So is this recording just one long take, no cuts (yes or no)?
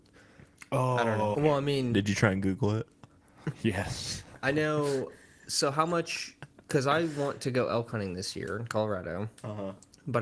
no